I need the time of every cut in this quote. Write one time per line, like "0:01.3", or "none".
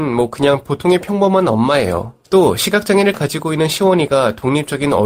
0:02.2